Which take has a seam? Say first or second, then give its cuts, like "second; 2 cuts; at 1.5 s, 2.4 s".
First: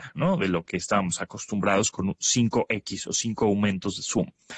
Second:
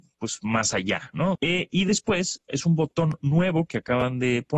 second; 2 cuts; at 1.4 s, 2.5 s